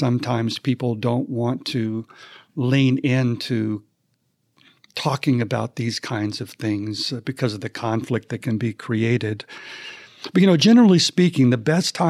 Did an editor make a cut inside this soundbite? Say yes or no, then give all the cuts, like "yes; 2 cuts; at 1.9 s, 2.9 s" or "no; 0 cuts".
no; 0 cuts